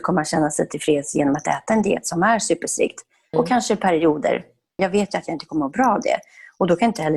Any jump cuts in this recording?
yes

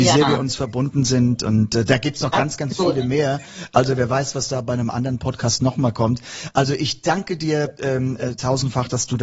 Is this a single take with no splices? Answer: yes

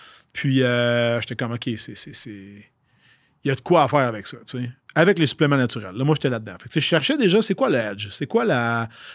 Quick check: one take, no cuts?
yes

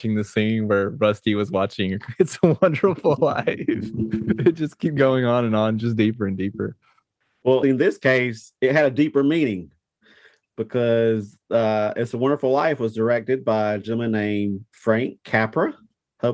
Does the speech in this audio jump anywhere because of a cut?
yes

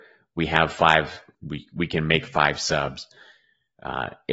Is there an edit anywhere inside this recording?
yes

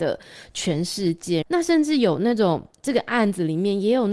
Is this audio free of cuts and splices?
no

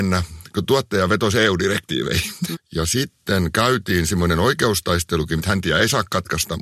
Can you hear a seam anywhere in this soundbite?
yes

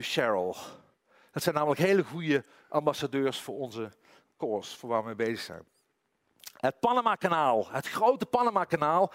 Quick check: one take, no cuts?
yes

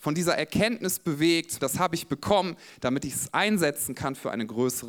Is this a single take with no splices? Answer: no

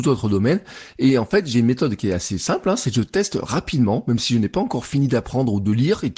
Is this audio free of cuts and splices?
yes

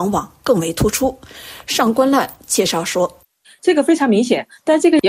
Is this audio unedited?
yes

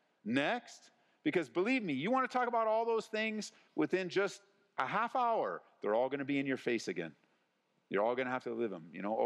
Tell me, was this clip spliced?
no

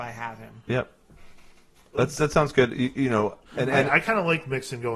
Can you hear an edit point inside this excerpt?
no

